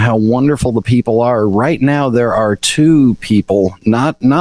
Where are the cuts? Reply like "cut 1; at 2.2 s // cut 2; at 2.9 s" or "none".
none